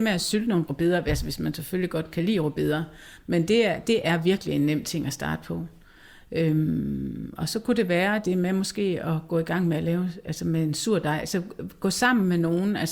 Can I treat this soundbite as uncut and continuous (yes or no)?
yes